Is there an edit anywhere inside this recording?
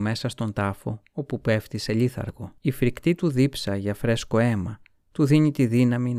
yes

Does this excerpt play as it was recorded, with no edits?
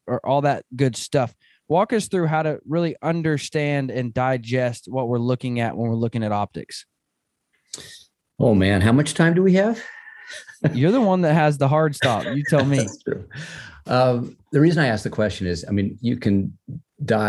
yes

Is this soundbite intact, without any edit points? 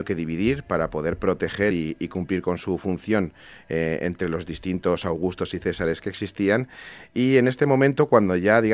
yes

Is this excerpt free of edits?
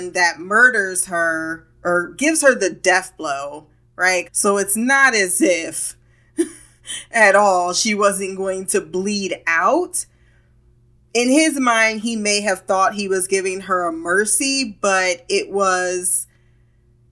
no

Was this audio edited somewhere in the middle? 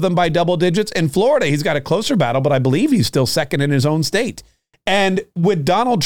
no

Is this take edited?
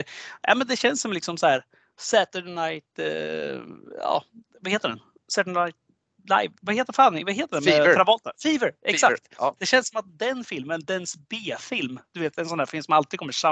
no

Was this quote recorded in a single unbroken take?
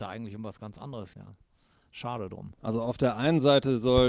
no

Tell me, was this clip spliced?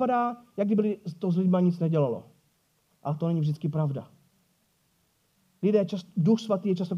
no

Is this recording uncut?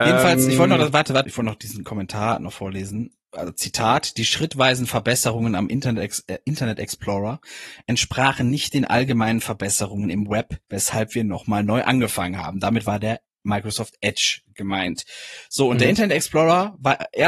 no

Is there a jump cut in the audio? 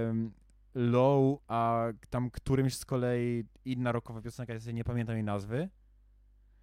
yes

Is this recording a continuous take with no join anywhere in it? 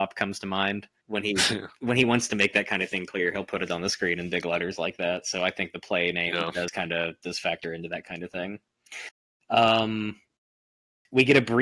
yes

